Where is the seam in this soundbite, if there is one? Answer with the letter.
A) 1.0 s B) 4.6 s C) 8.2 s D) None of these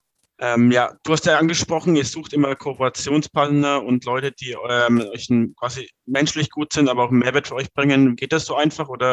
C